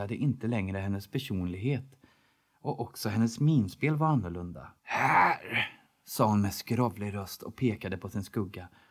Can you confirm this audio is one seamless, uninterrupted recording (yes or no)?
no